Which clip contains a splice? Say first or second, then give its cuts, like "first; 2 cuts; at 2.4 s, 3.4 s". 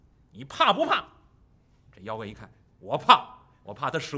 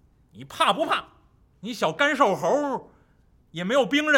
second; 1 cut; at 1.5 s